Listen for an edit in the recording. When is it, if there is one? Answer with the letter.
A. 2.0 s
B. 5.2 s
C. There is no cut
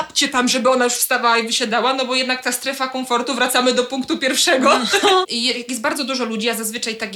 B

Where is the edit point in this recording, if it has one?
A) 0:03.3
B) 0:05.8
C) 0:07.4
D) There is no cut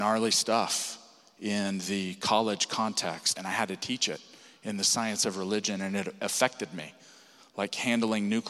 A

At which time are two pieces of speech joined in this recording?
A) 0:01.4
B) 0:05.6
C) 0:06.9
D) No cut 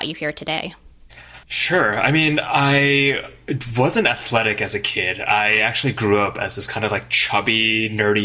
A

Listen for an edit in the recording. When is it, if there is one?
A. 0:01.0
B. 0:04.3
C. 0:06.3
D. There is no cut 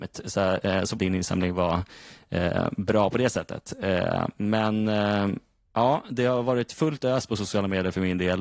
A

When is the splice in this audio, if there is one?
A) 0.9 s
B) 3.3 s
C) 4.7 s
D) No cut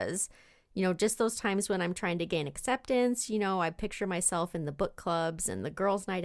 D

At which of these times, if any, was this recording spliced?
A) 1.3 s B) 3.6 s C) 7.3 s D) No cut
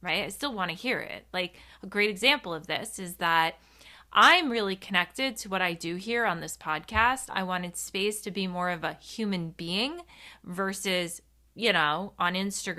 C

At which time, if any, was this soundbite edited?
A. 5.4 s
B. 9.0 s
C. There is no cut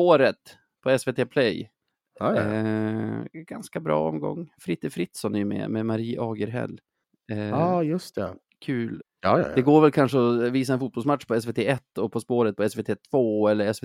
B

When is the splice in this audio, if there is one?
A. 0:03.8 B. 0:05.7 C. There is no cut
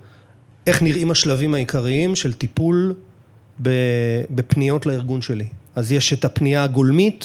B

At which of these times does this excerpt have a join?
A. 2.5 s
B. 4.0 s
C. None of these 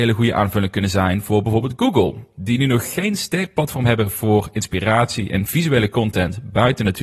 C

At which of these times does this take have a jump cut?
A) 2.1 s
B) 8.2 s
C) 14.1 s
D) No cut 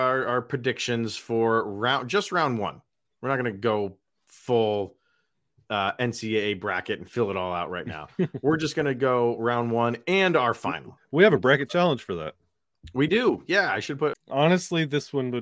C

